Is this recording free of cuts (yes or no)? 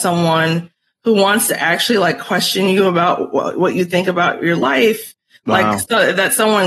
yes